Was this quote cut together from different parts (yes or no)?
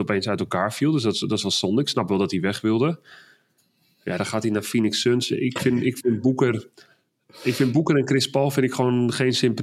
no